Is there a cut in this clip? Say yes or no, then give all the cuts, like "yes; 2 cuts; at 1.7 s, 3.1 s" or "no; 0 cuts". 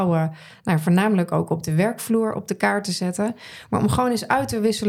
no; 0 cuts